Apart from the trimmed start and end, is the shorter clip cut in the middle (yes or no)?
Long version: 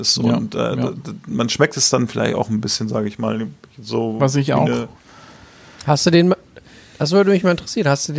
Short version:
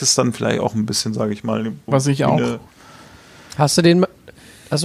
yes